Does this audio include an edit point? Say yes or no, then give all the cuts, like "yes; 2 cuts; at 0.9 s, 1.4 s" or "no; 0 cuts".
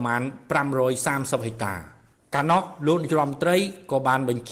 no; 0 cuts